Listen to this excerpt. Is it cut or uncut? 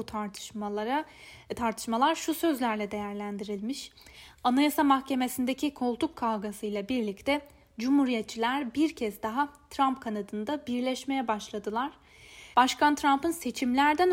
cut